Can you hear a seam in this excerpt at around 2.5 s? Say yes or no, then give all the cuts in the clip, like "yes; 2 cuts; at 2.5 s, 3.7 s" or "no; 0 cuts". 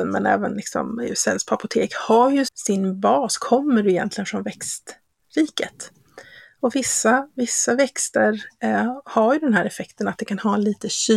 yes; 1 cut; at 2.5 s